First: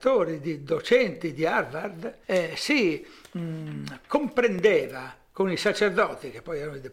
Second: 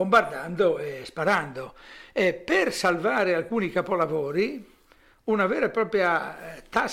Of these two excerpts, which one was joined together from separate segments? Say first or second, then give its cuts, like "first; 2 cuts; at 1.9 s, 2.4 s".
first; 1 cut; at 2.2 s